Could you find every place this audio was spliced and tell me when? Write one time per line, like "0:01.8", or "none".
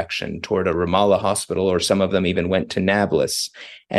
none